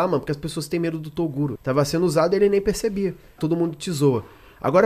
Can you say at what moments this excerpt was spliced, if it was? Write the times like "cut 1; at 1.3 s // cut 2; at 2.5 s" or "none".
cut 1; at 1.6 s // cut 2; at 3.4 s